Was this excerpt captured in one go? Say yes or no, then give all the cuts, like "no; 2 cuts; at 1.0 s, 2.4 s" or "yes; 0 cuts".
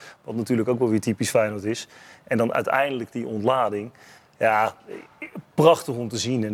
yes; 0 cuts